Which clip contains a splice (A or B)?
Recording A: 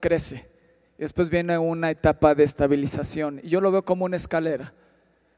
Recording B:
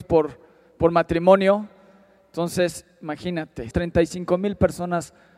B